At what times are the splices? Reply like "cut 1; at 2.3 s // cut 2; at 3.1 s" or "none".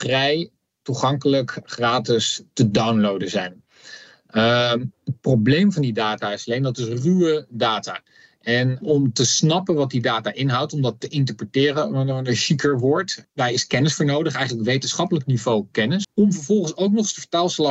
cut 1; at 16.0 s